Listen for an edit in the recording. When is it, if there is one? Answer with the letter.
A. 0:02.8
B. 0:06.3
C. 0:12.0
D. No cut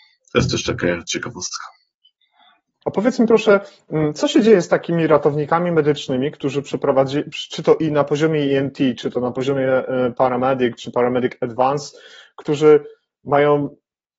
A